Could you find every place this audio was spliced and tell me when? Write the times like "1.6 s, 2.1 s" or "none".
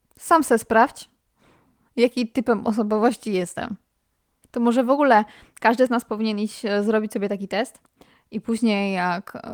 4.4 s